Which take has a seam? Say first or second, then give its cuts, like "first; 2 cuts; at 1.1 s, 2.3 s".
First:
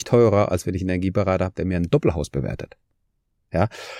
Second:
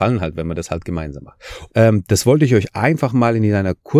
second; 1 cut; at 1.7 s